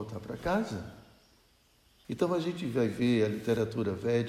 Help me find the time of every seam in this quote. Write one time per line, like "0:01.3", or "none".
0:02.0